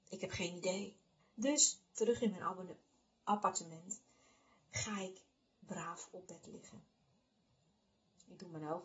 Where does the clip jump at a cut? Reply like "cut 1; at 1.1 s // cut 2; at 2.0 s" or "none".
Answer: cut 1; at 1.2 s